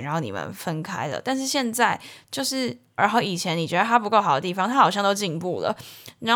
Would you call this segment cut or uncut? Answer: cut